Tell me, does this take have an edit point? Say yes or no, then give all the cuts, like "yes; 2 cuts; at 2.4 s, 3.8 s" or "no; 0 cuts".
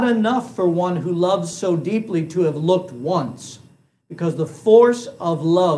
no; 0 cuts